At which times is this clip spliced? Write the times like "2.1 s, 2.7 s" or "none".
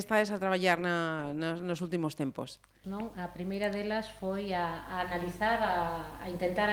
2.8 s